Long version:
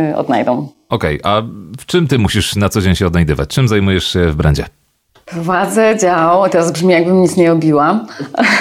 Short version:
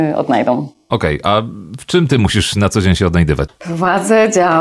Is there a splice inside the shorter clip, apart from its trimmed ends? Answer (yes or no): yes